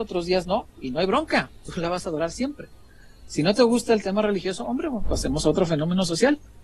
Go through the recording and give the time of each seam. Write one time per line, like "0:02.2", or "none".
none